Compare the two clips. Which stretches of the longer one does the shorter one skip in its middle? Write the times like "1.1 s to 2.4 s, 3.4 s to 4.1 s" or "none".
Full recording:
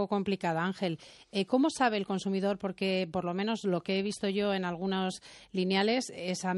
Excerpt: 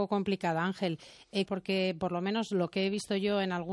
1.5 s to 2.6 s